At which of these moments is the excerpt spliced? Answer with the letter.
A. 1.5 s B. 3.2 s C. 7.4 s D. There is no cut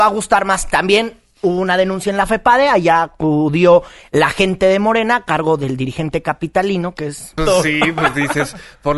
C